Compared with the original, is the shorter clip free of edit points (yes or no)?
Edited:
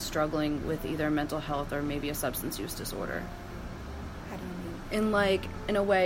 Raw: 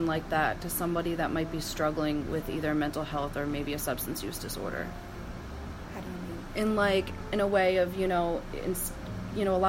yes